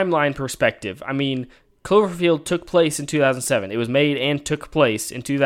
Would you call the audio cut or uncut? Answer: uncut